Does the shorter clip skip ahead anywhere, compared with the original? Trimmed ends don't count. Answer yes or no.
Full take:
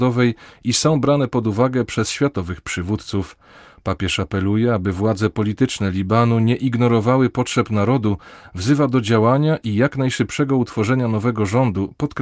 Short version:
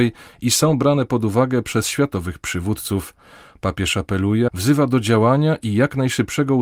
yes